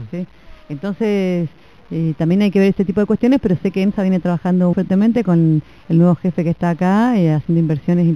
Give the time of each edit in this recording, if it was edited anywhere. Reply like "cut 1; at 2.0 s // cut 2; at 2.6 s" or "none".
cut 1; at 4.7 s